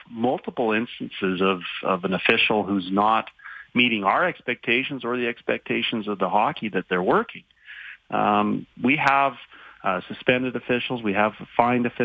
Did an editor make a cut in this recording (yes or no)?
no